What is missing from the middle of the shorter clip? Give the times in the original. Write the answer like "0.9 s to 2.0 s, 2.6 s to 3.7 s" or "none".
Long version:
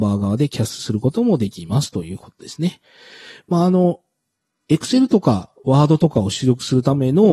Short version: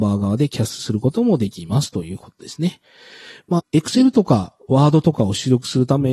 3.6 s to 4.5 s